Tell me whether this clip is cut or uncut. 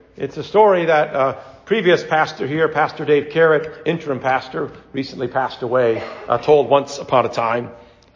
uncut